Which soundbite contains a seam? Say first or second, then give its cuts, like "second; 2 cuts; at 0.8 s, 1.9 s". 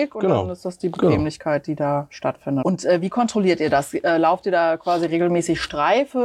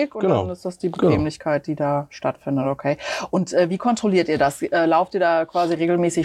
first; 1 cut; at 2.6 s